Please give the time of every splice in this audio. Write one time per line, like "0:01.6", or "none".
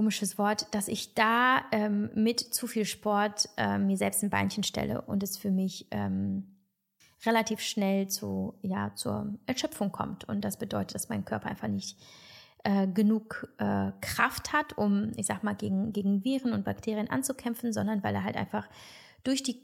none